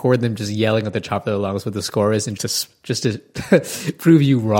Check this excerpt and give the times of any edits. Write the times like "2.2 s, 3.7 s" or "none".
2.4 s